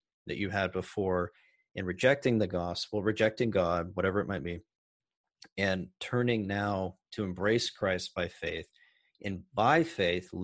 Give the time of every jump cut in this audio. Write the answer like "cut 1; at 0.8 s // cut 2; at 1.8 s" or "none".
none